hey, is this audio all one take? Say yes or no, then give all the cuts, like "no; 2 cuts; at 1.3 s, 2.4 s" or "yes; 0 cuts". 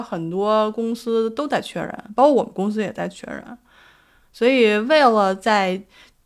yes; 0 cuts